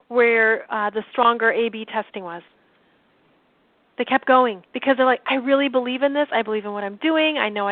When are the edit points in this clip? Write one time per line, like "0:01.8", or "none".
0:04.7